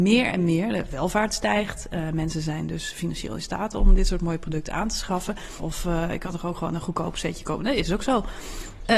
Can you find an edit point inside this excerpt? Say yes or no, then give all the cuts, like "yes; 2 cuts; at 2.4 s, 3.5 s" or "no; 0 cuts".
yes; 1 cut; at 5.6 s